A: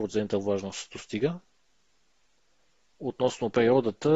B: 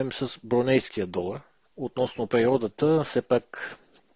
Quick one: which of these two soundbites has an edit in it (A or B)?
B